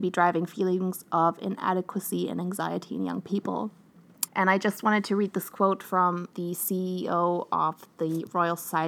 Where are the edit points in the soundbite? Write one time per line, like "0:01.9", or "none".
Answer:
0:04.3
0:06.3